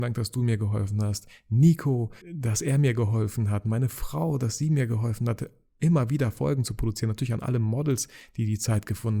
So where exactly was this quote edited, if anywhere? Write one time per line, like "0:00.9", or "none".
0:02.2